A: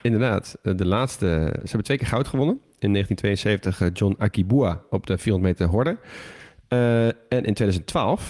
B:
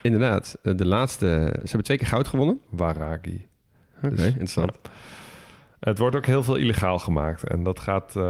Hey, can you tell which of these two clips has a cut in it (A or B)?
B